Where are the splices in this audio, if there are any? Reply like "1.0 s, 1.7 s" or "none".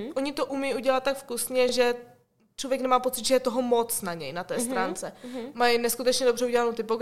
none